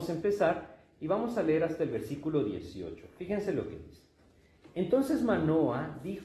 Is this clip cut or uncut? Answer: uncut